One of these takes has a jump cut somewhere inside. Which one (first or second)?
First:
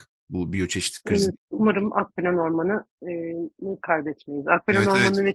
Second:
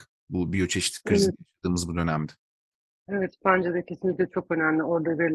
first